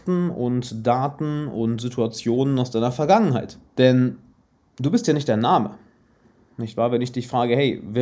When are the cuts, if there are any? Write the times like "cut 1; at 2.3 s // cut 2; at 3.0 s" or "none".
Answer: cut 1; at 3.7 s